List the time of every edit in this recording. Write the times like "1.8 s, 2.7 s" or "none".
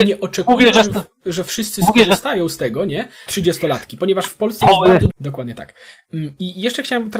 3.3 s, 5.1 s

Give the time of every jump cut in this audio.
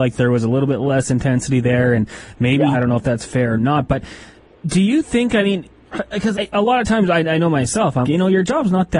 2.7 s, 6.3 s, 8.0 s

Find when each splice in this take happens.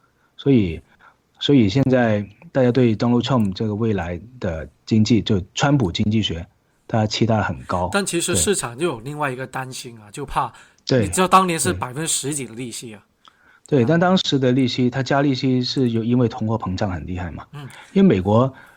10.8 s

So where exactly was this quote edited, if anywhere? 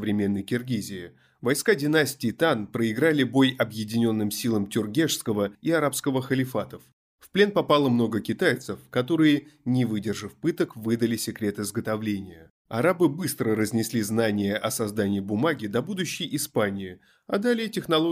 12.6 s

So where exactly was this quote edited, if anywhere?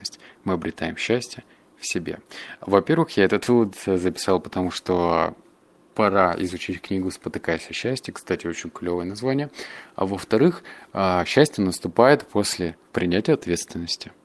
none

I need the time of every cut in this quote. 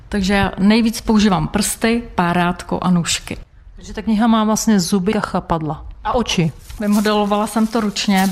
5.1 s

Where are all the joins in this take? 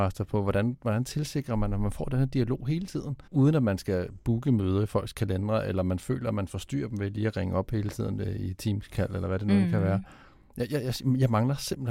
3.3 s

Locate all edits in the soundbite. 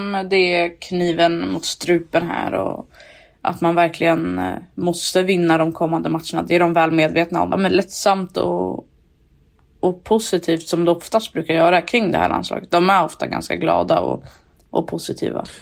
7.5 s

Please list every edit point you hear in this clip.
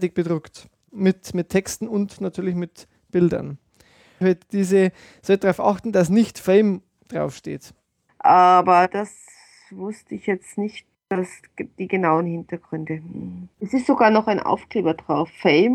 4.2 s, 8.1 s, 13.5 s

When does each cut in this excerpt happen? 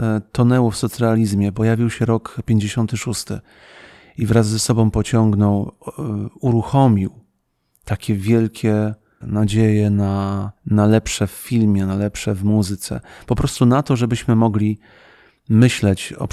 9.2 s, 10.6 s

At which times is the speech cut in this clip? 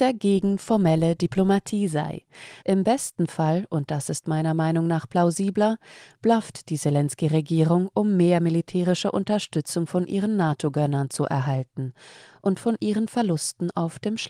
2.6 s

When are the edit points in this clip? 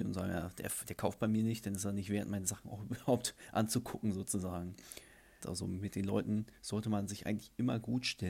5.4 s

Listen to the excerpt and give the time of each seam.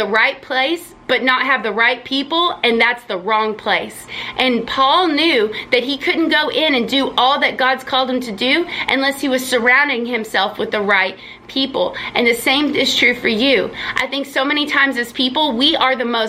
none

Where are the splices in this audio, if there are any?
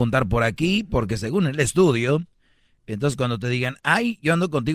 none

